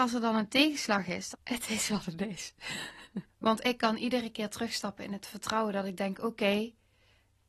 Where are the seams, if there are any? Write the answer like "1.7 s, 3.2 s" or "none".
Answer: 1.3 s, 3.3 s